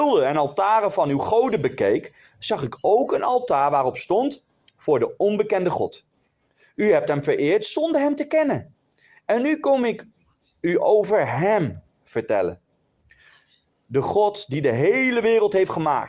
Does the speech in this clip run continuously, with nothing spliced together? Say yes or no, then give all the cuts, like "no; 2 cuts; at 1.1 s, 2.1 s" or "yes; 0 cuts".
yes; 0 cuts